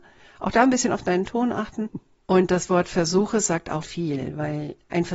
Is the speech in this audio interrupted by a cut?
yes; 2 cuts; at 1.9 s, 3.8 s

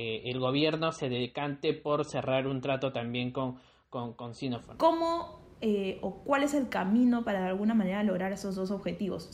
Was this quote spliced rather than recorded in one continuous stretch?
yes; 1 cut; at 4.8 s

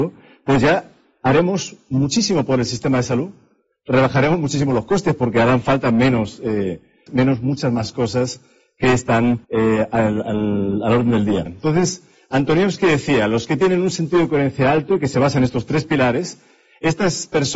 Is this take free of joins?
no; 3 cuts; at 7.1 s, 9.4 s, 11.5 s

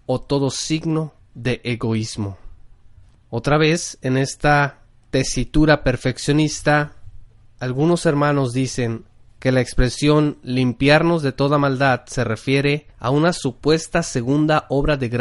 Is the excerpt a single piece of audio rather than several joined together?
no; 2 cuts; at 3.1 s, 12.9 s

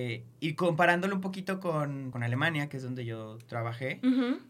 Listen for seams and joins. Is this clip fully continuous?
no; 1 cut; at 2.1 s

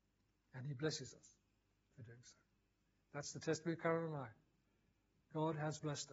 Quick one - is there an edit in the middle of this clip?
no; 0 cuts

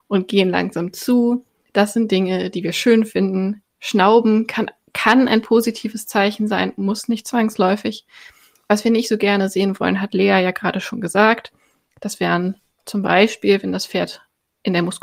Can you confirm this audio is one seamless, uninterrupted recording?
yes; 0 cuts

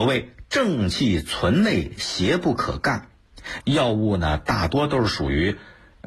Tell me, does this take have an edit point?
yes; 1 cut; at 3.6 s

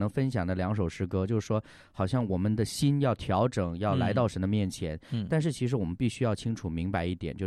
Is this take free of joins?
yes; 0 cuts

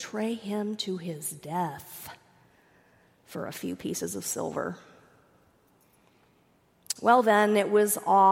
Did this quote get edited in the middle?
no; 0 cuts

